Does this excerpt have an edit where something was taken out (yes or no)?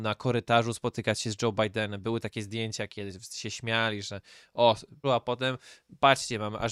yes